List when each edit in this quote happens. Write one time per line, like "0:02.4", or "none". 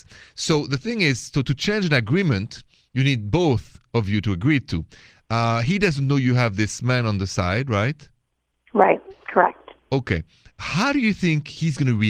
none